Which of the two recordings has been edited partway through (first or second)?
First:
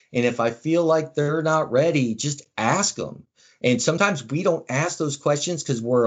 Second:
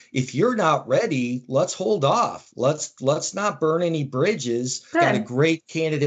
second